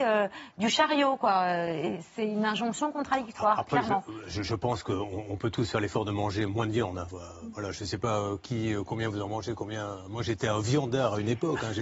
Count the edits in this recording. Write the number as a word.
one